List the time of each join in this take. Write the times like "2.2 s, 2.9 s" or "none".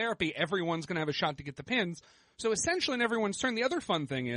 none